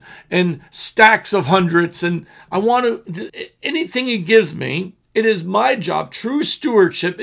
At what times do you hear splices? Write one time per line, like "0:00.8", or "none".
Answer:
0:03.3
0:05.0